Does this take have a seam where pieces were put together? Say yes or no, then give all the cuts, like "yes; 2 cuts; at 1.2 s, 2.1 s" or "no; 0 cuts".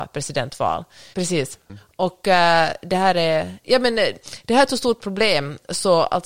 yes; 1 cut; at 1.1 s